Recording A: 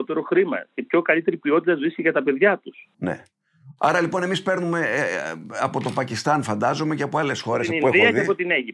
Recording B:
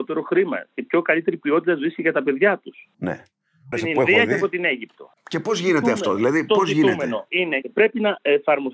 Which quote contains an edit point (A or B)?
B